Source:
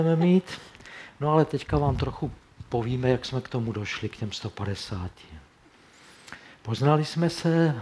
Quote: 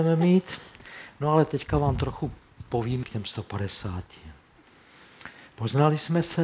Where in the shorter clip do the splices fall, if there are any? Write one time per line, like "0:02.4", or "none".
0:03.0